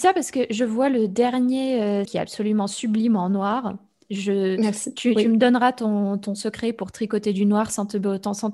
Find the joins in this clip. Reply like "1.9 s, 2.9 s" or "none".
2.0 s